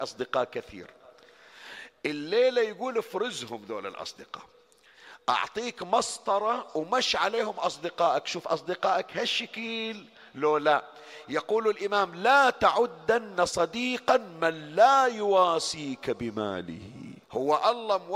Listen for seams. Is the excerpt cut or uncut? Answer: cut